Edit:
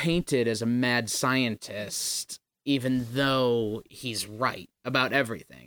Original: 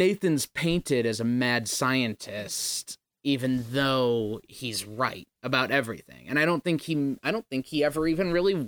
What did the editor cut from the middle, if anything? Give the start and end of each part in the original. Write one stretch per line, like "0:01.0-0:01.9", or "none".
none